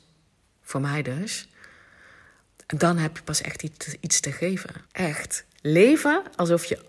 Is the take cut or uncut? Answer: cut